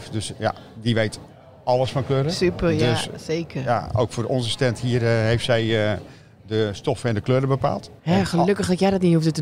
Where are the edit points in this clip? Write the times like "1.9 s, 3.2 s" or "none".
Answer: 8.0 s